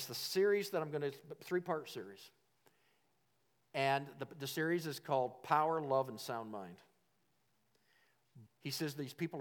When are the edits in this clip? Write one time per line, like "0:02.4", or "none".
0:08.5